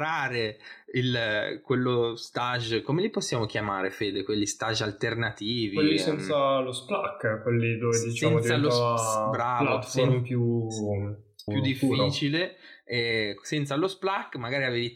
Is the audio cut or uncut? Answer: cut